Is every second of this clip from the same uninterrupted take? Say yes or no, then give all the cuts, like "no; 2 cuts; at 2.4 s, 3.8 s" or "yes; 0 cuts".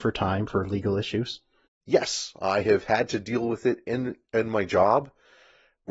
yes; 0 cuts